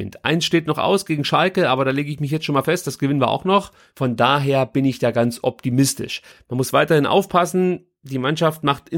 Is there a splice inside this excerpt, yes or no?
yes